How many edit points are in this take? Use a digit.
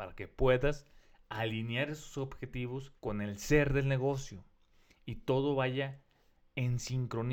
1